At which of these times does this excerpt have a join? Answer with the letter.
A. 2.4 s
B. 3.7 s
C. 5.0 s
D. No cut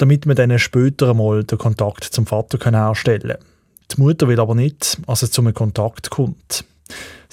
C